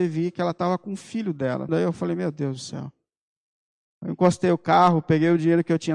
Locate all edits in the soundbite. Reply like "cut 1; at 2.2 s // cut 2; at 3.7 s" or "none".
cut 1; at 1.7 s